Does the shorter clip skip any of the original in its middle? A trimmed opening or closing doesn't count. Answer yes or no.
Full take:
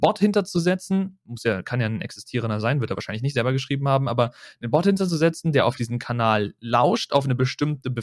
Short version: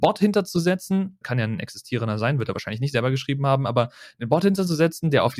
yes